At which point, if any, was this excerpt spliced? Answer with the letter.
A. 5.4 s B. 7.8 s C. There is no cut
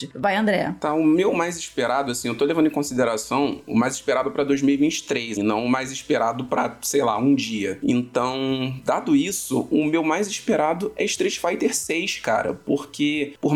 A